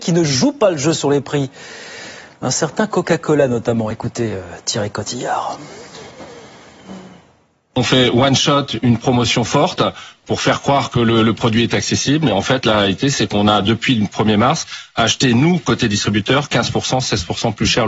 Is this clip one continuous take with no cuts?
yes; 0 cuts

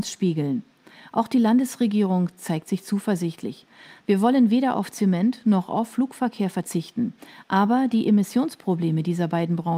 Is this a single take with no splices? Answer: yes; 0 cuts

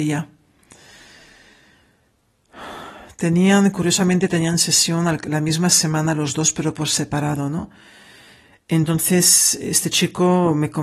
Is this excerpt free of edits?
yes; 0 cuts

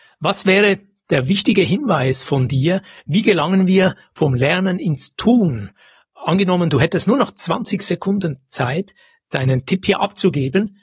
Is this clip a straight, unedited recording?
yes; 0 cuts

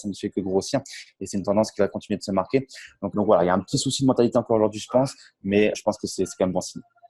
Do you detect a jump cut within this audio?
yes; 2 cuts; at 3.1 s, 5.7 s

